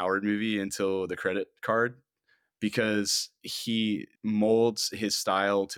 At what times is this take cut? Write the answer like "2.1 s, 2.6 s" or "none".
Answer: 4.2 s